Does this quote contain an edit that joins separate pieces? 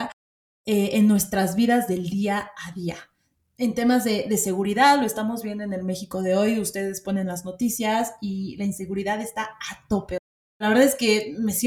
no; 0 cuts

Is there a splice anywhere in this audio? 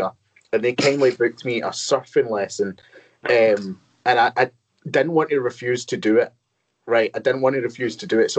no; 0 cuts

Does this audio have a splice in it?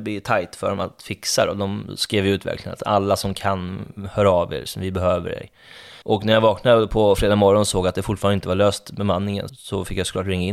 yes; 2 cuts; at 6.0 s, 9.5 s

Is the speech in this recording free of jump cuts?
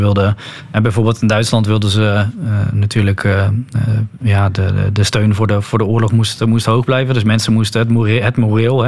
yes; 0 cuts

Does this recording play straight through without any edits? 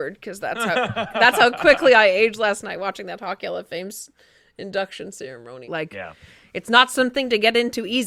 no; 1 cut; at 5.6 s

